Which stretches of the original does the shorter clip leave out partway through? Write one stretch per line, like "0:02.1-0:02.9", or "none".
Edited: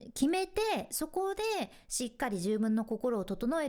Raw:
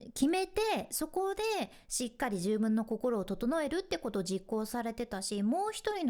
none